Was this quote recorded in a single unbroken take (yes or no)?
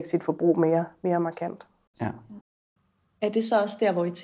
yes